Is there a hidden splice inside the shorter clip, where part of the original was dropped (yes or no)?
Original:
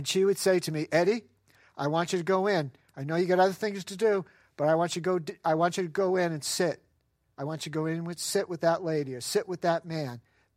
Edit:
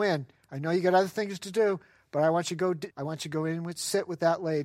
yes